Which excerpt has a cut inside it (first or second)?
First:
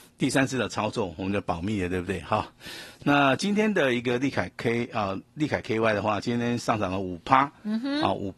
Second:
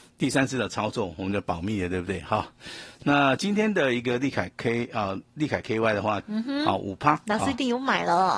second